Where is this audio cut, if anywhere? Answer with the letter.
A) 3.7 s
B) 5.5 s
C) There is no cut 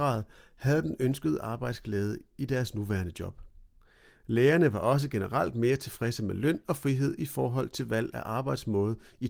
C